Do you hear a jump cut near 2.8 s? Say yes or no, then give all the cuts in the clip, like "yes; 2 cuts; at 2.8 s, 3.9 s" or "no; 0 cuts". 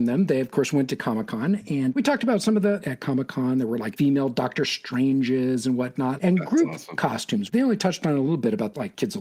yes; 2 cuts; at 2.8 s, 6.2 s